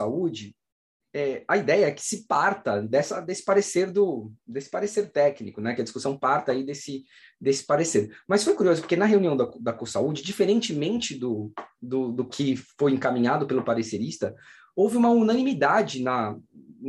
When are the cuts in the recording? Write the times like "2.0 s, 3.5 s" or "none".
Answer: none